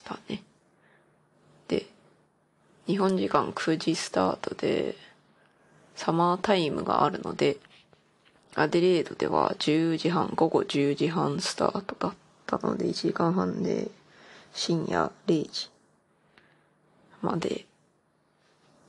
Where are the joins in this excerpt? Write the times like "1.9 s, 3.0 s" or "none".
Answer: none